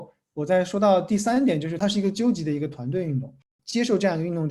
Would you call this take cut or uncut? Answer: cut